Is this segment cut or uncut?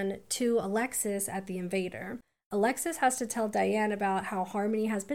uncut